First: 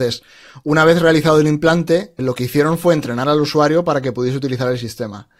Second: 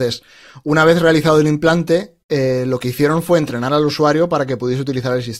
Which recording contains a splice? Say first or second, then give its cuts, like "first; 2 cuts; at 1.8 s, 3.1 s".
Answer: first; 1 cut; at 2.2 s